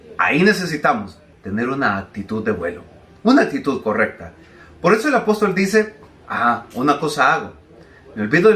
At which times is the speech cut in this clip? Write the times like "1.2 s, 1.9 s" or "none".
1.3 s